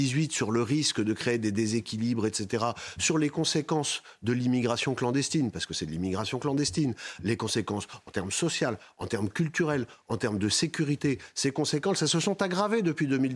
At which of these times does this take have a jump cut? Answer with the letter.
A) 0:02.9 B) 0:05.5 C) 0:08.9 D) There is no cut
D